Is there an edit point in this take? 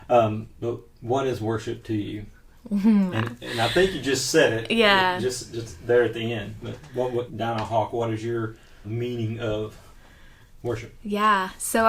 yes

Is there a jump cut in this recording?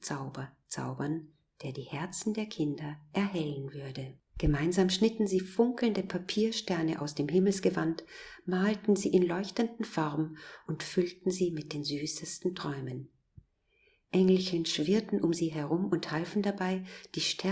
yes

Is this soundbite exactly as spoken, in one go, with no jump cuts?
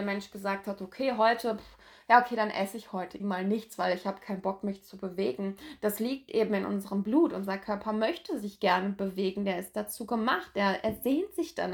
no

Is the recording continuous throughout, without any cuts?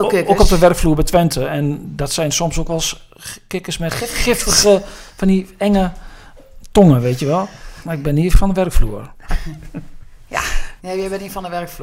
no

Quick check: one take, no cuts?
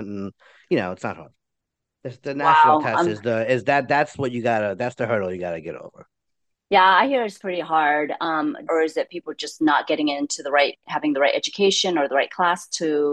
no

